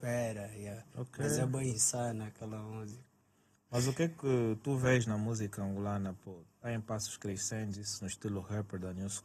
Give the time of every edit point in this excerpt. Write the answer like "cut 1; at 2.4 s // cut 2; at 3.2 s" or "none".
none